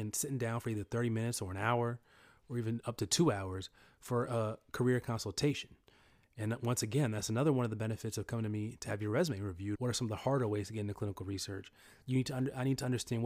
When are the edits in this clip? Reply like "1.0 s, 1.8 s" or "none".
9.8 s